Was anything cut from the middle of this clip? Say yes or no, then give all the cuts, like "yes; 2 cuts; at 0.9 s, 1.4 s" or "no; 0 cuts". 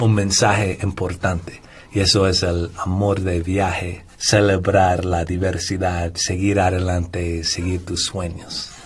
yes; 1 cut; at 4.1 s